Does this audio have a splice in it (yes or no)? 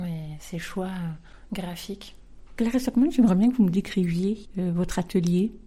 yes